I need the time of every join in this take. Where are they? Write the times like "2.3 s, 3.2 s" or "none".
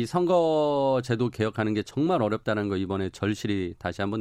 none

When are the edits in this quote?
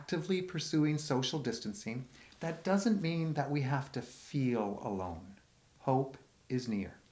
none

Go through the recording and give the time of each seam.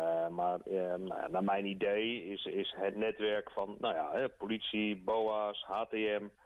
none

